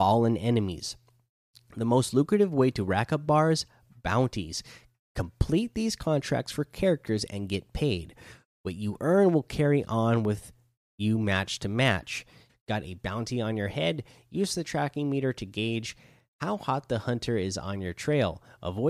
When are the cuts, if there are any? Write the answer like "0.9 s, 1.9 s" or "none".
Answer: 12.5 s